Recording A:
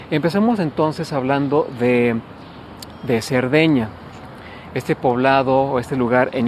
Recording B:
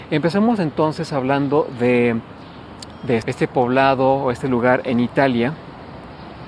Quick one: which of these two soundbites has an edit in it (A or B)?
B